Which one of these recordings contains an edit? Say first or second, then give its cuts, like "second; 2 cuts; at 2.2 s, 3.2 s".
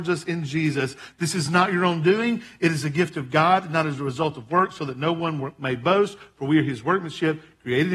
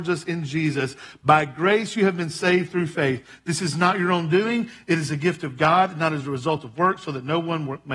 first; 1 cut; at 1.1 s